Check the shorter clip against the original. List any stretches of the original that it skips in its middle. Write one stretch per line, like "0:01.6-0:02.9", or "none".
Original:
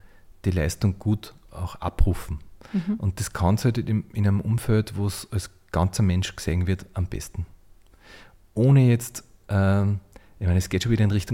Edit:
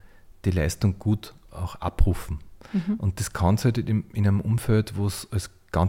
none